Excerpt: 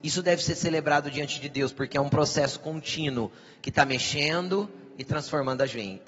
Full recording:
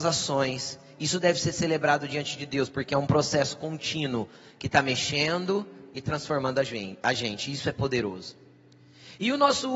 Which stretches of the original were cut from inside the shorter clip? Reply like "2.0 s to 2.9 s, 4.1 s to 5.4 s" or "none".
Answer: none